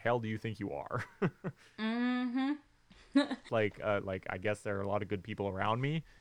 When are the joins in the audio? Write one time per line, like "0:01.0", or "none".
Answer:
0:03.5